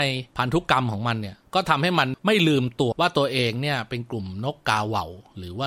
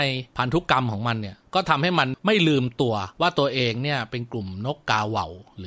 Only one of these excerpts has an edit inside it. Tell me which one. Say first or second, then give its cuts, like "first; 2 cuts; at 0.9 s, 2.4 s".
first; 1 cut; at 2.9 s